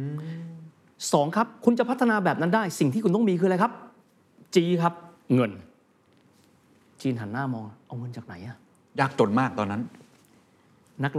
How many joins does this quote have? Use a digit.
0